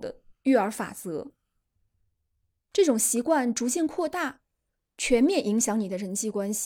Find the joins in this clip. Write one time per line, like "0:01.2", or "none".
0:02.6